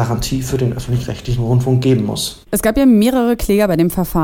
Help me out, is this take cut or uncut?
uncut